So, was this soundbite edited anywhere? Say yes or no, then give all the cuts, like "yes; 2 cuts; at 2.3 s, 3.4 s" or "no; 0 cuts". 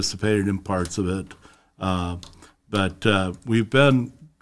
no; 0 cuts